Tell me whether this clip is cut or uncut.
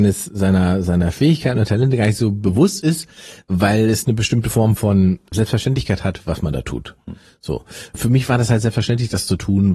uncut